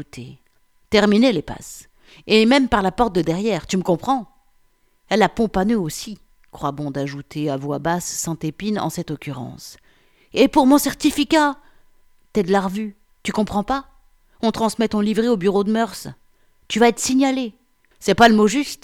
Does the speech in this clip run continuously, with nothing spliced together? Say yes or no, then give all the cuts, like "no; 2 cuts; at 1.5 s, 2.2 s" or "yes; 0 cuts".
no; 1 cut; at 17.9 s